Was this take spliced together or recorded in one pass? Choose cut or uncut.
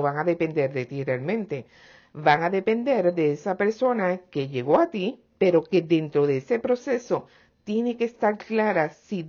uncut